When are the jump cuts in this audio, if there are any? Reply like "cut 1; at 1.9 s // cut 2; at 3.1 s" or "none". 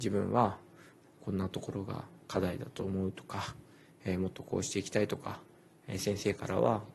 none